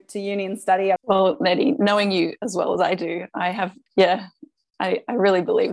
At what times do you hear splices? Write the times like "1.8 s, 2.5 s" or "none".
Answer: 1.0 s, 3.9 s